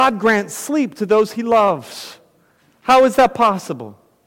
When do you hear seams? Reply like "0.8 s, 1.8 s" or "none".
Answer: none